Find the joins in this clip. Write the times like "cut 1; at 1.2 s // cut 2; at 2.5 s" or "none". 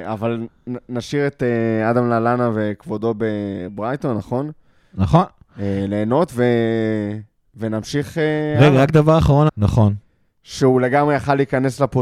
cut 1; at 9.5 s